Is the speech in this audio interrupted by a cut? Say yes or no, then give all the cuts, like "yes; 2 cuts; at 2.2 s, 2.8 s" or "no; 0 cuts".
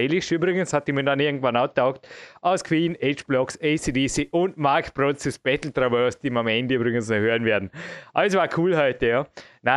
no; 0 cuts